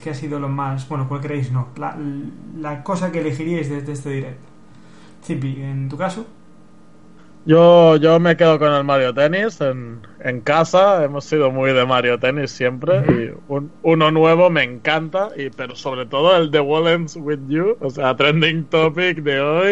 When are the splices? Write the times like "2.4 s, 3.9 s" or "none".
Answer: 1.7 s